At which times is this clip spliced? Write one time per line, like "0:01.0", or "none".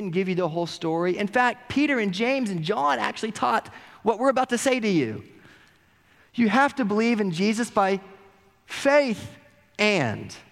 none